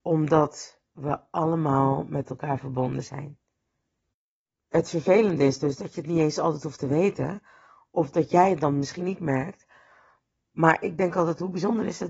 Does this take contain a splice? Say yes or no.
no